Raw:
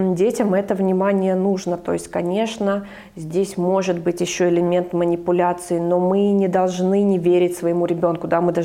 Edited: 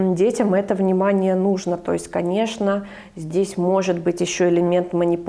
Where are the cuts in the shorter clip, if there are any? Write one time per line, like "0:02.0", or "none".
none